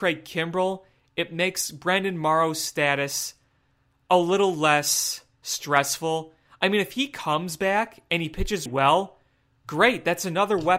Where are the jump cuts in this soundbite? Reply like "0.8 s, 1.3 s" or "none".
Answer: 8.7 s